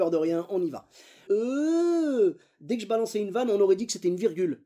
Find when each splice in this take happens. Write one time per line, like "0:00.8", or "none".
0:01.3